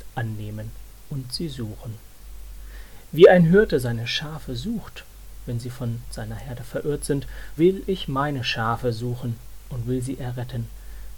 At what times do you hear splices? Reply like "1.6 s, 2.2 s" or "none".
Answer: 7.6 s